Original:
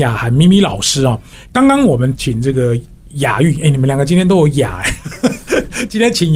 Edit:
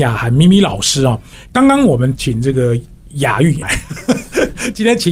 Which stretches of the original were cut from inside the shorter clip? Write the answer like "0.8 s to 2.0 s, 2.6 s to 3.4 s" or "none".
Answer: 3.6 s to 4.8 s